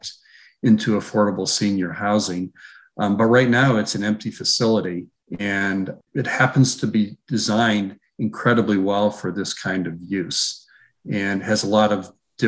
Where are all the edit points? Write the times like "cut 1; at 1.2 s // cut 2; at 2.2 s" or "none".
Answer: none